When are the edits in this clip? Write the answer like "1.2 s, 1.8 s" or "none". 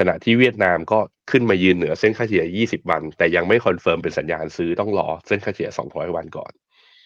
none